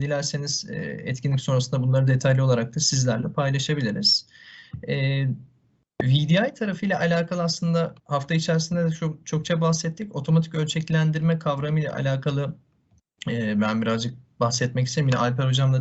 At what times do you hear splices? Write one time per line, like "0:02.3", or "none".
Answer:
0:08.0